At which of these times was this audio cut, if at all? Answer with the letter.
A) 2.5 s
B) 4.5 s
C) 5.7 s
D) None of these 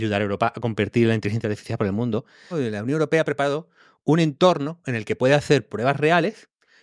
A